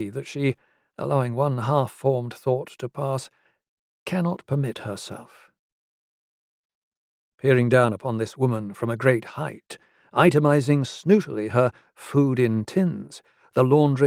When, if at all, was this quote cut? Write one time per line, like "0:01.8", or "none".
0:07.3